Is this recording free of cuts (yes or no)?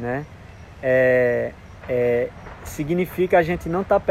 no